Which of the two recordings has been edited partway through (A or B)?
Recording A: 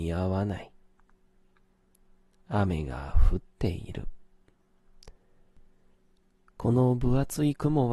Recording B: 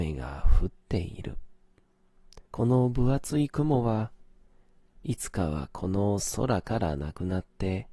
B